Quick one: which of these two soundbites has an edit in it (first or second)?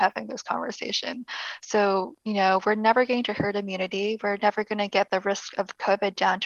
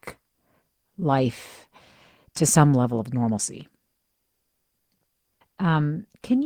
second